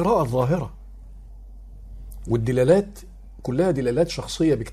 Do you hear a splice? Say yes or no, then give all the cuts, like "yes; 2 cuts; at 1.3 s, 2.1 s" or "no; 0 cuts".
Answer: no; 0 cuts